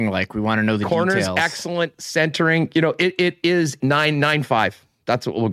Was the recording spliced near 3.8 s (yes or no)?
yes